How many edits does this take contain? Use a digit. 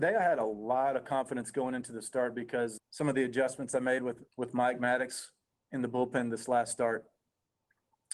2